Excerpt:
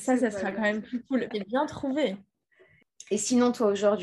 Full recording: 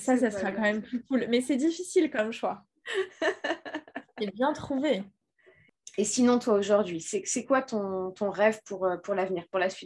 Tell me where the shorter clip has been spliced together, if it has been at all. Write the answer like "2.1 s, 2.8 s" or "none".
1.3 s